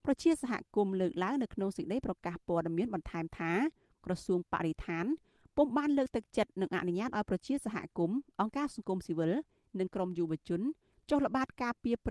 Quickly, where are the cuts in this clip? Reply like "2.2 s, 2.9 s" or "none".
none